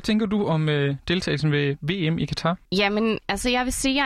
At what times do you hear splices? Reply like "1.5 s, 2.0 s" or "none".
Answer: 2.7 s

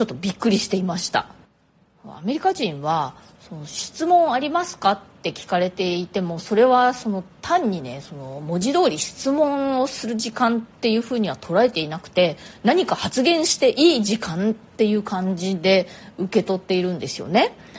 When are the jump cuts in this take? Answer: none

